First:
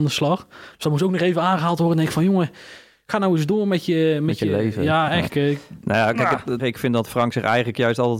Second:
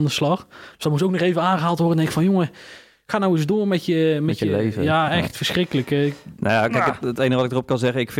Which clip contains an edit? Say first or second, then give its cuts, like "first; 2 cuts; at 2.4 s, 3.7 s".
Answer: first; 2 cuts; at 5.3 s, 6.6 s